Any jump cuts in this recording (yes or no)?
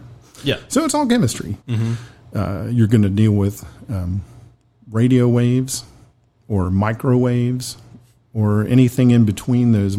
yes